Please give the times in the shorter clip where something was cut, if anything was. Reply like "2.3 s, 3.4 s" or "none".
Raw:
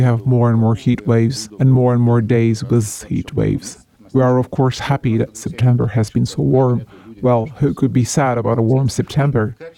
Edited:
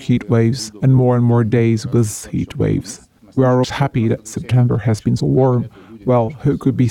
3.6 s, 5.2 s